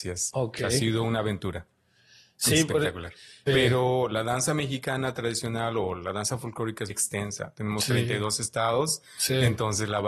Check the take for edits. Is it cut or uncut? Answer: cut